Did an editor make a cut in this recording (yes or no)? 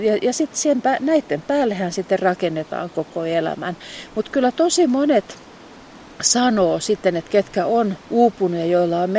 yes